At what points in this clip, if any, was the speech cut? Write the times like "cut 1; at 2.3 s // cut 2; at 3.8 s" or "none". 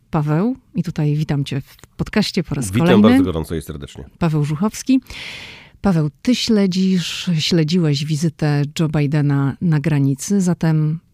none